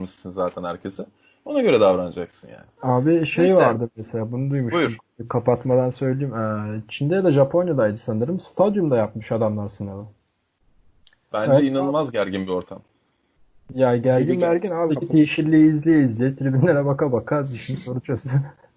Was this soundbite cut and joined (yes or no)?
yes